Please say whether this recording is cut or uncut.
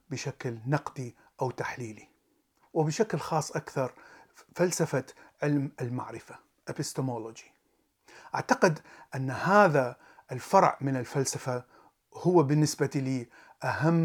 uncut